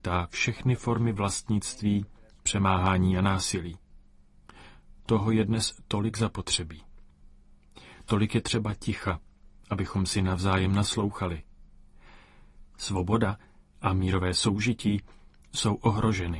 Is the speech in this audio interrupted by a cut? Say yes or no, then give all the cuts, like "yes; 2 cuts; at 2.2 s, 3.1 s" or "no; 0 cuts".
yes; 1 cut; at 12.7 s